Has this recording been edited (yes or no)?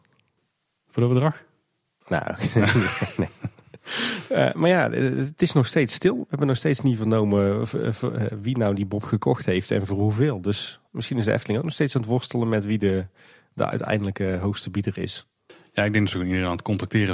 no